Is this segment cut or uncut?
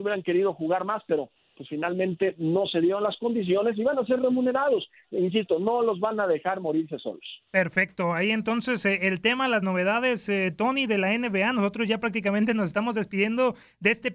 uncut